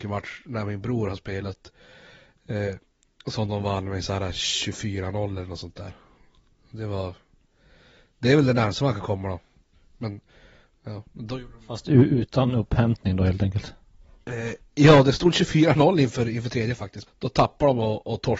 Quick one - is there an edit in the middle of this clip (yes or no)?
yes